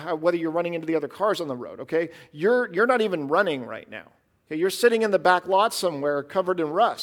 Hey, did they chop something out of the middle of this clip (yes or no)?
no